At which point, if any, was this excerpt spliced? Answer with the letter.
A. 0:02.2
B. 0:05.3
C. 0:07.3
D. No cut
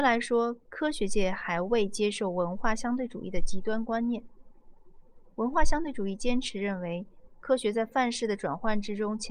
C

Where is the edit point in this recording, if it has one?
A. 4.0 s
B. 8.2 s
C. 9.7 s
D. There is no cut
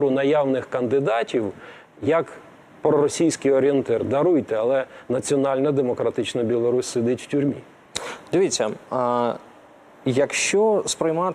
D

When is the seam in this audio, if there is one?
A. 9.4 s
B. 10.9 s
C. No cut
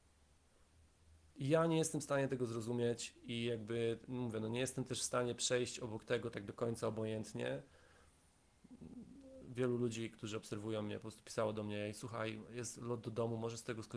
A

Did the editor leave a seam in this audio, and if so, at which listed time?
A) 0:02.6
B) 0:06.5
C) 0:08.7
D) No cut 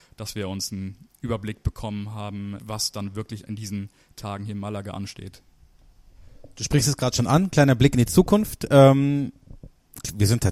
A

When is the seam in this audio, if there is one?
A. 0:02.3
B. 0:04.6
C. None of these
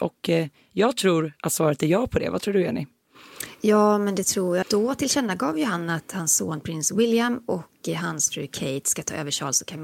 B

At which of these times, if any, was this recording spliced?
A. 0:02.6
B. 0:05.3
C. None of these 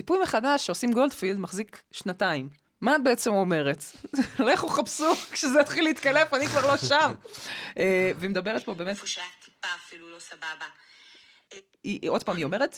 A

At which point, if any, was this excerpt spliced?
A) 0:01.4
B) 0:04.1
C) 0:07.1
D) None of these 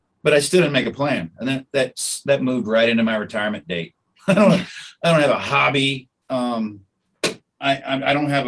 B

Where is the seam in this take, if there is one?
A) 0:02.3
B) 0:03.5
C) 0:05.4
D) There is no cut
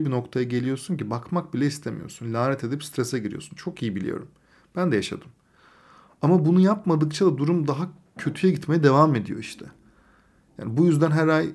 D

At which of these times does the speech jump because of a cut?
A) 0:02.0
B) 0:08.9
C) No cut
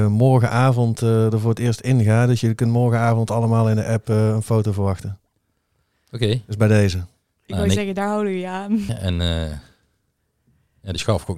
B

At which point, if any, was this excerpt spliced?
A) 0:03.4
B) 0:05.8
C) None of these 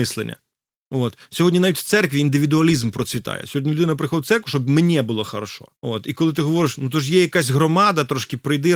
B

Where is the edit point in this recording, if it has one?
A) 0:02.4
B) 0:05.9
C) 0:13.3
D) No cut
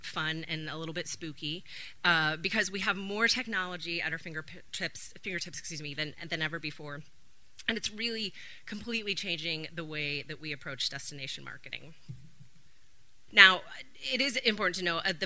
C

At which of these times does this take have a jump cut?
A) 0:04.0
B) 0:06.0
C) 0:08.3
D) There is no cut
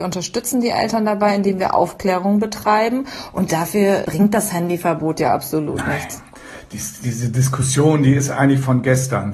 A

